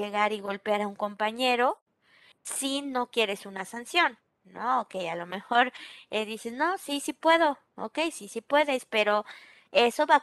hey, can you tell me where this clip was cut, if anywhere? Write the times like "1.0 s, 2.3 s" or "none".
none